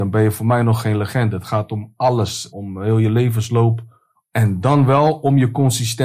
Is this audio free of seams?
no; 1 cut; at 2.5 s

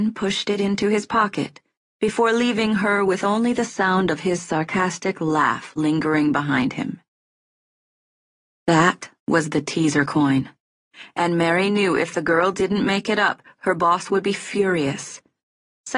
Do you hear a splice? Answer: no; 0 cuts

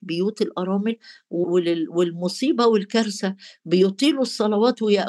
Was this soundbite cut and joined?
yes; 1 cut; at 1.4 s

